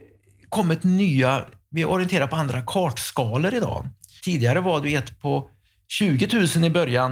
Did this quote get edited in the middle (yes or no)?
yes